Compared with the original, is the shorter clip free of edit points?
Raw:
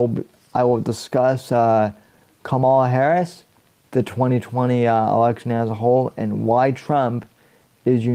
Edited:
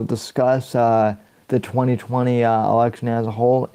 no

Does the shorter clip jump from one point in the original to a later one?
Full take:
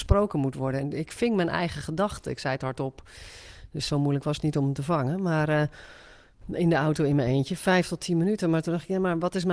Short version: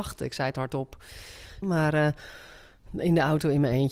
yes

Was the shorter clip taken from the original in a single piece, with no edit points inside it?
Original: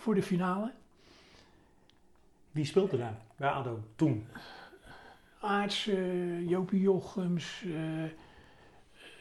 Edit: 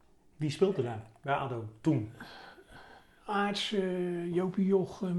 yes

